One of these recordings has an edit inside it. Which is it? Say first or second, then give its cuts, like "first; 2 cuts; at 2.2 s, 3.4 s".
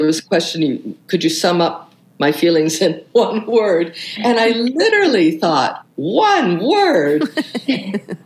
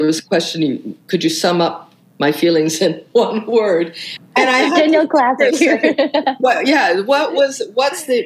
second; 1 cut; at 4.2 s